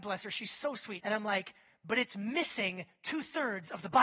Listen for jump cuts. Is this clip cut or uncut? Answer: cut